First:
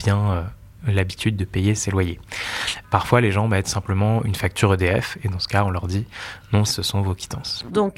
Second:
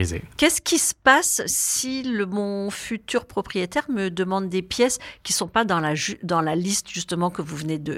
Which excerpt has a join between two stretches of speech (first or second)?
first